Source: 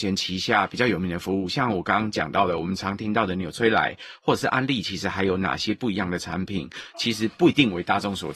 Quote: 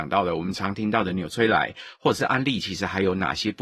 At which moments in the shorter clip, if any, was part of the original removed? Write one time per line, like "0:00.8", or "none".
none